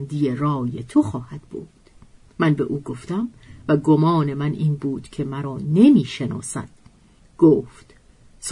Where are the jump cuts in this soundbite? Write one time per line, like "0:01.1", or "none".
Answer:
0:07.2